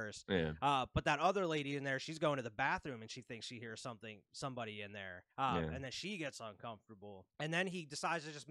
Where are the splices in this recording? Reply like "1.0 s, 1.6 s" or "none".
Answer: 5.3 s